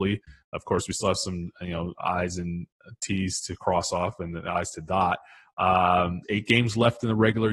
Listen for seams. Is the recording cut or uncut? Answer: cut